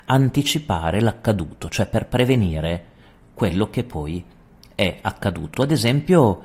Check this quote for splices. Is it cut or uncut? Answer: uncut